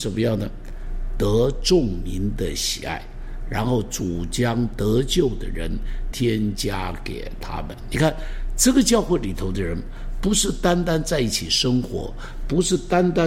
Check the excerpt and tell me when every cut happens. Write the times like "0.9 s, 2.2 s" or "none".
6.1 s

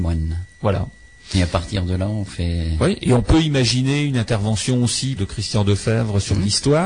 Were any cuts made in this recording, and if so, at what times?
5.2 s

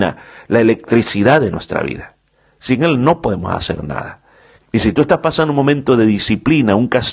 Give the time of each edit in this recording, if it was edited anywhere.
4.6 s

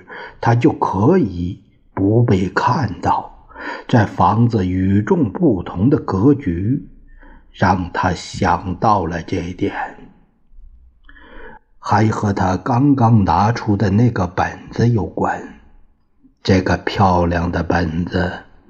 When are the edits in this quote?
11.6 s

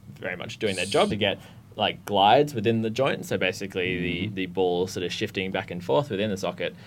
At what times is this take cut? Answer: 1.1 s

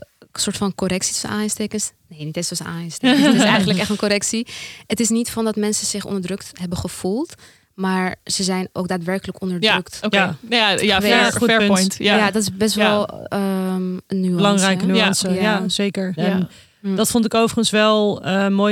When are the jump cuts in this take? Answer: 14.1 s, 16.2 s

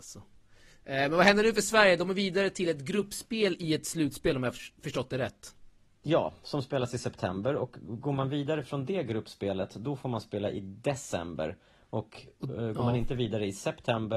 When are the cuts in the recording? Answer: none

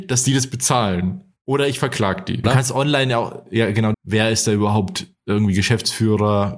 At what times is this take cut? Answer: 2.4 s, 3.9 s

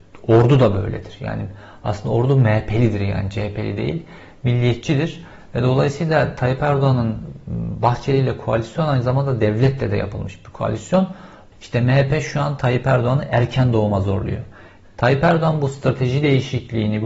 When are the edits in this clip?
11.5 s, 14.8 s

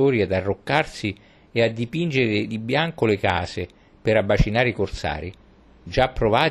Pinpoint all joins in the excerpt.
none

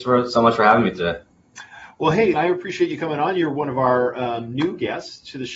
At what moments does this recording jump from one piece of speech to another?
2.3 s

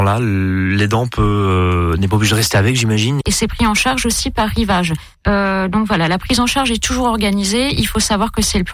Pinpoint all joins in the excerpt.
3.2 s, 5.1 s

